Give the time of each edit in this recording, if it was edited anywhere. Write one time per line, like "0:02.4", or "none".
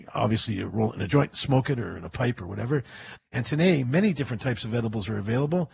0:03.2

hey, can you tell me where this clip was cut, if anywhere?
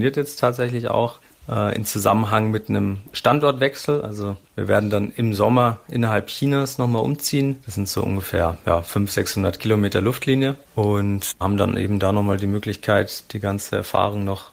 0:04.5

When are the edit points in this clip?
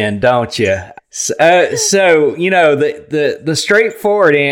0:01.0

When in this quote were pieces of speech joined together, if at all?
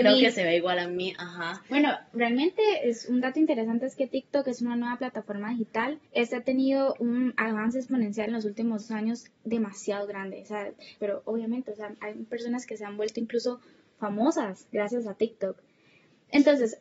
0:06.1
0:11.0

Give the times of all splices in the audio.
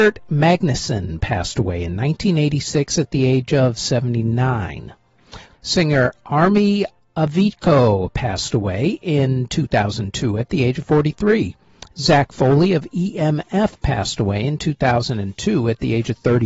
0:05.5

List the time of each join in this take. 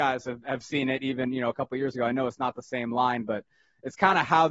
none

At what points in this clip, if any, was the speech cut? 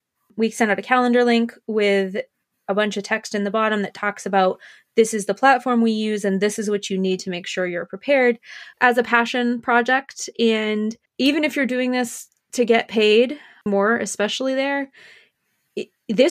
0:08.7
0:11.1
0:13.7

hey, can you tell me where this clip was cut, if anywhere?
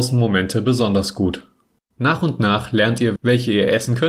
0:01.8
0:03.2

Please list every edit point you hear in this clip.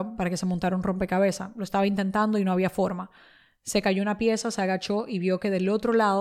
none

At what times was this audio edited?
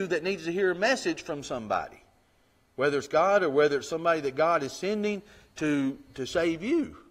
none

